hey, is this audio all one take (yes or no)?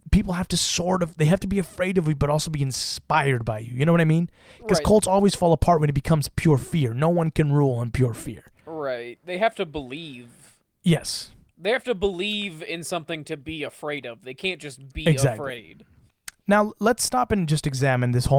yes